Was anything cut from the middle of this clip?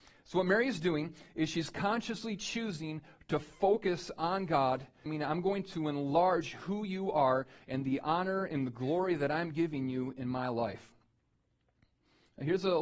yes; 1 cut; at 5.1 s

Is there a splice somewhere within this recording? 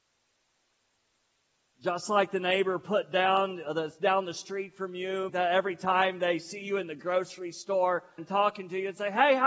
yes; 2 cuts; at 5.3 s, 8.2 s

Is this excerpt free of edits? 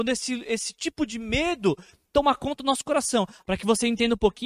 no; 1 cut; at 3.4 s

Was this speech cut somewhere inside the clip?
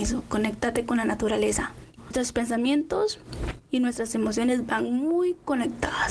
yes; 1 cut; at 2.0 s

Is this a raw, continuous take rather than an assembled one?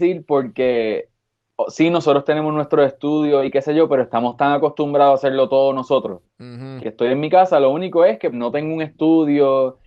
no; 2 cuts; at 6.8 s, 8.3 s

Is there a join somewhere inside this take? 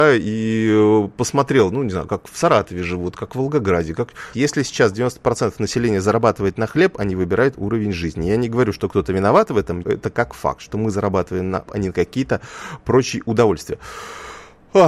yes; 3 cuts; at 4.3 s, 9.8 s, 11.7 s

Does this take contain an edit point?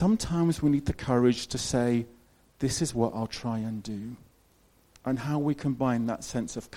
yes; 1 cut; at 5.0 s

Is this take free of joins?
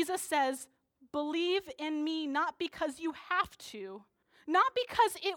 yes; 0 cuts

